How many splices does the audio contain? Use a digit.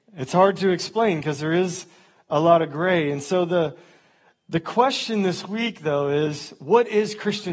0